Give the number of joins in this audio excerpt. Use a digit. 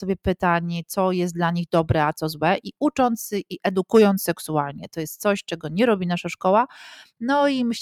0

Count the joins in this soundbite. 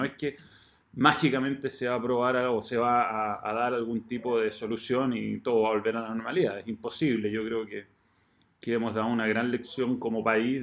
0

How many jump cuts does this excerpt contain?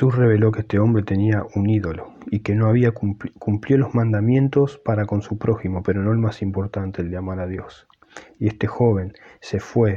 0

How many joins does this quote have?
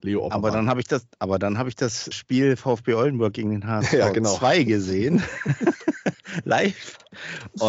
1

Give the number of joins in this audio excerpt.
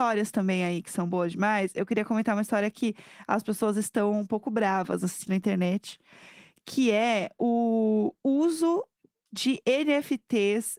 1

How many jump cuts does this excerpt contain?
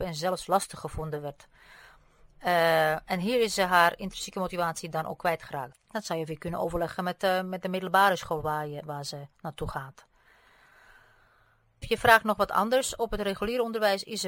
2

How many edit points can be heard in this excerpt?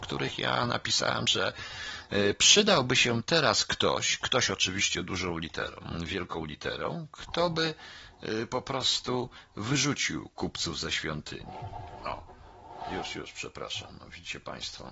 0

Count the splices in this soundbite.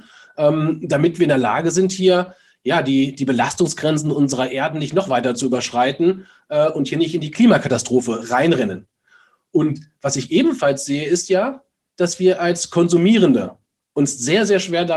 0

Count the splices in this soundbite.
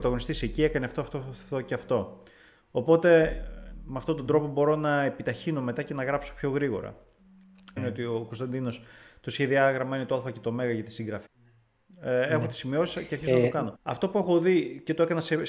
3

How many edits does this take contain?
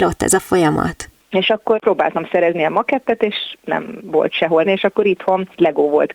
2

